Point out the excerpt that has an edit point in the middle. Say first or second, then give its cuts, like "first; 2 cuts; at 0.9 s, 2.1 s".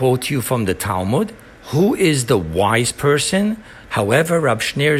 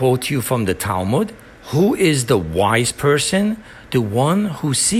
first; 1 cut; at 3.9 s